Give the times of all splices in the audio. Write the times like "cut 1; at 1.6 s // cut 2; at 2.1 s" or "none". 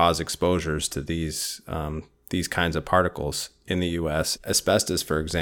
cut 1; at 4.4 s